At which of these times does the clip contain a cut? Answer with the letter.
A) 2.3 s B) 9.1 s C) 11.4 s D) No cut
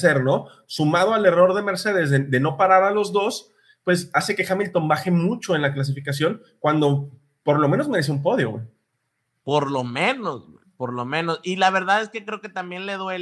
D